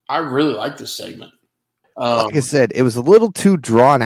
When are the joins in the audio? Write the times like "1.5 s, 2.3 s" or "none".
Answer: 1.8 s

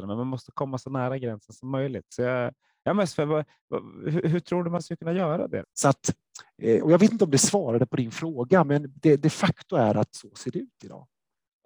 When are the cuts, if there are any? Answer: 5.6 s

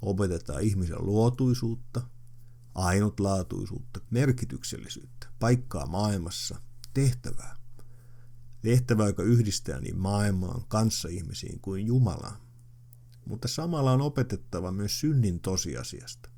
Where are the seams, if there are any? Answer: 4.1 s

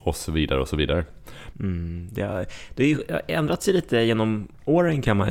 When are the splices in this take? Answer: 1.5 s

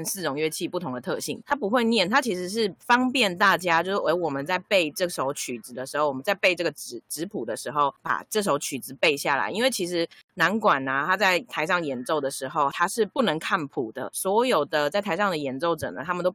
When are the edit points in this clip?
1.4 s

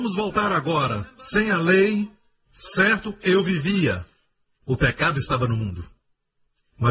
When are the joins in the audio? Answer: 4.6 s

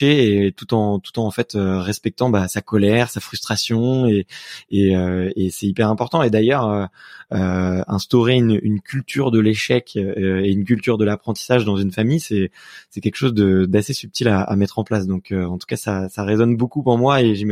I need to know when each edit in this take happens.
none

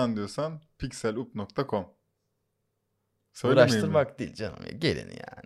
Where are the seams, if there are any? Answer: none

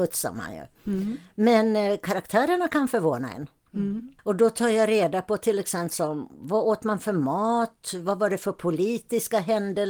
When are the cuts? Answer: 4.2 s

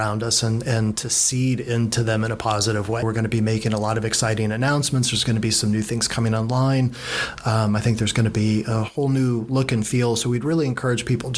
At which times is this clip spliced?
3.0 s

